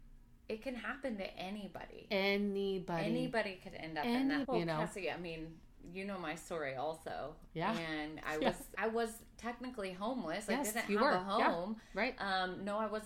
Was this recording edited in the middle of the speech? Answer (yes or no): yes